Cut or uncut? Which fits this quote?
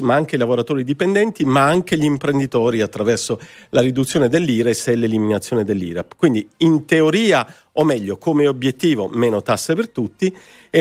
uncut